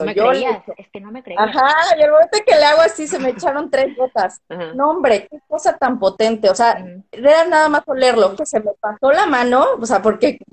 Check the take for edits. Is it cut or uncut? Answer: cut